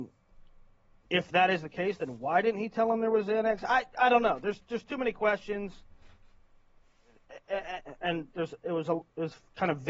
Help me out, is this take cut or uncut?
uncut